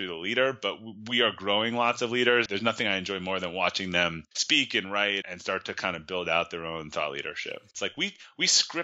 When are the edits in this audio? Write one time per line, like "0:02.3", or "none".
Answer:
0:02.5
0:05.2
0:07.7